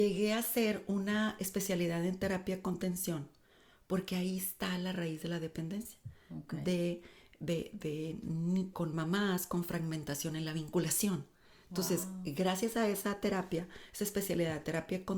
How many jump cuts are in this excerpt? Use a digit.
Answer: 1